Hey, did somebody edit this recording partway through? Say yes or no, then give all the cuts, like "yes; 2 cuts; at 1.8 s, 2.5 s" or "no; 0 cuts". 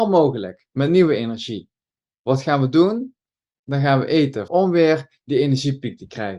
yes; 1 cut; at 4.5 s